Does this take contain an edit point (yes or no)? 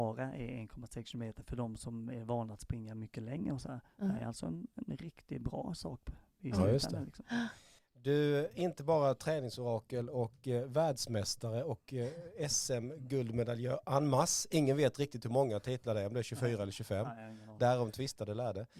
no